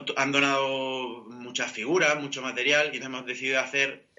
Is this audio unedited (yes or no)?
no